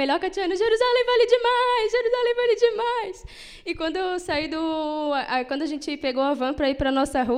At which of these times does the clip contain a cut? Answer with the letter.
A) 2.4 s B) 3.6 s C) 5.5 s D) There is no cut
D